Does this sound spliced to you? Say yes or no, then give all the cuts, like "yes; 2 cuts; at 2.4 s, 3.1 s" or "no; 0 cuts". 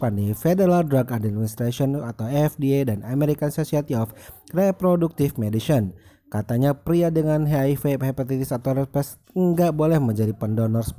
no; 0 cuts